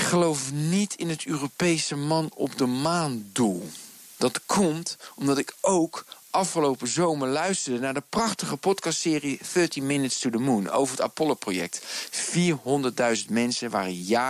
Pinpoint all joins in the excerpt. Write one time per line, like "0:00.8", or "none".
none

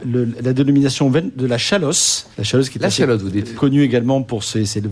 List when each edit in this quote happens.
0:02.3
0:03.6

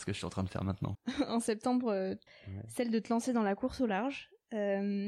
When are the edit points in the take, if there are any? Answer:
0:00.9
0:02.3

